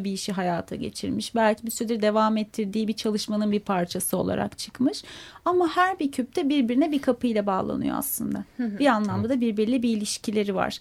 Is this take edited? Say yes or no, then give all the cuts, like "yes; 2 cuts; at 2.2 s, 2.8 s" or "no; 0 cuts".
no; 0 cuts